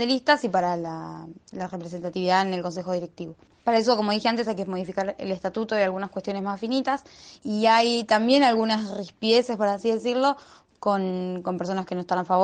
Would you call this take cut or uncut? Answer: cut